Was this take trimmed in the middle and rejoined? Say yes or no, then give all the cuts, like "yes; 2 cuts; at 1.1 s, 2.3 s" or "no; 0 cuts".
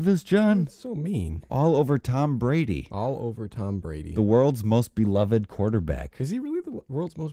no; 0 cuts